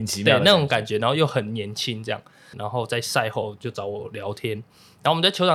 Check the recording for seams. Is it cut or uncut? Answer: cut